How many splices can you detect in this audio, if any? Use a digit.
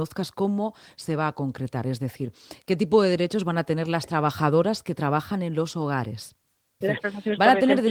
1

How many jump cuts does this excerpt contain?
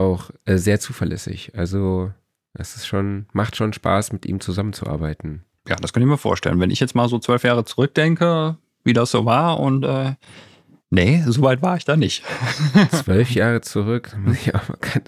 0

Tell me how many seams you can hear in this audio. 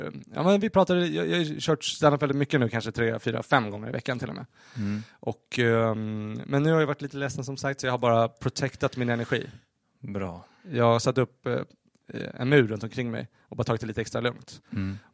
0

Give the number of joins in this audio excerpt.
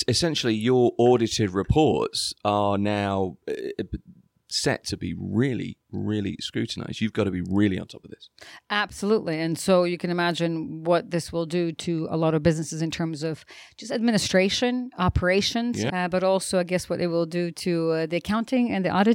1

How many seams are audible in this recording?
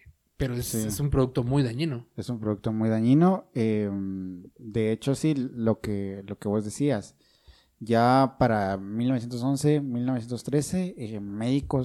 0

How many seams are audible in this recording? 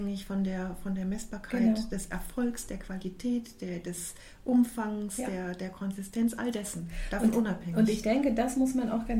0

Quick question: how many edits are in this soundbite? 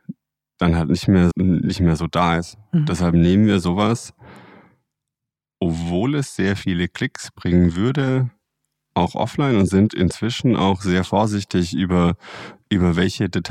1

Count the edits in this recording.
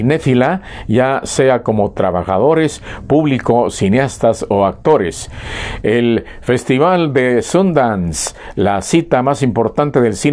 1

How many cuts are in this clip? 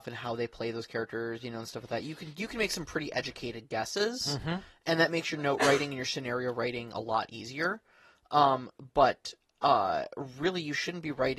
0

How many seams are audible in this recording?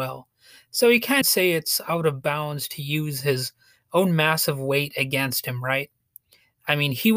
1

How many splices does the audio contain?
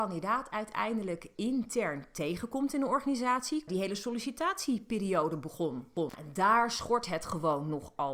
1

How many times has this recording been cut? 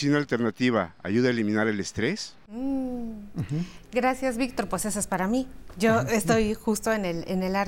0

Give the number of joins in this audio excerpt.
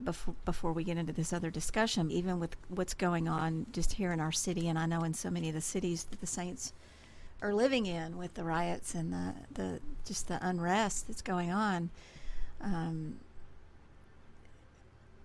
1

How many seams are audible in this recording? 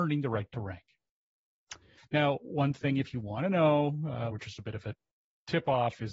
2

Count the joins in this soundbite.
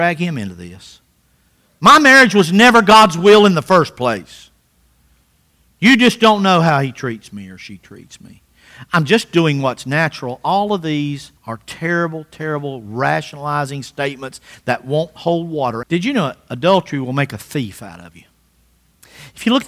2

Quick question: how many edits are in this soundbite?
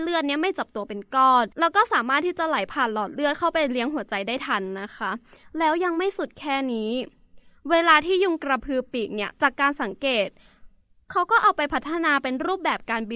1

